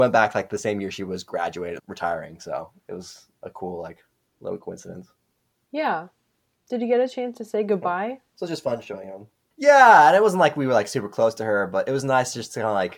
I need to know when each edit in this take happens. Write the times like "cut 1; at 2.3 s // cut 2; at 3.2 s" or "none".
cut 1; at 1.8 s

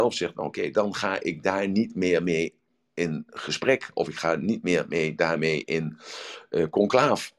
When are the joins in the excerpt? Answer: none

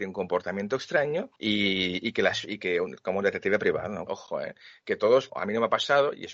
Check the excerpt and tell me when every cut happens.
cut 1; at 1.4 s // cut 2; at 4.1 s // cut 3; at 5.3 s

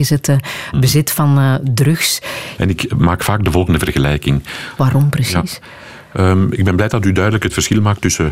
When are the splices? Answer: cut 1; at 2.6 s // cut 2; at 4.8 s

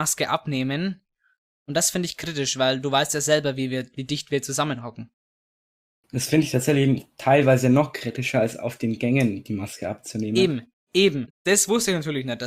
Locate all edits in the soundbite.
cut 1; at 11.3 s

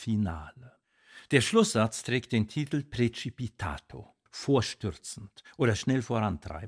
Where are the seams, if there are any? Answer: cut 1; at 4.3 s

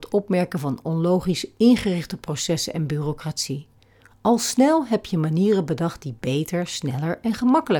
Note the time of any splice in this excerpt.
none

